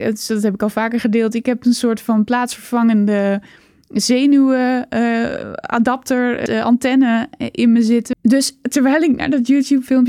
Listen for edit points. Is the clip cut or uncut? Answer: cut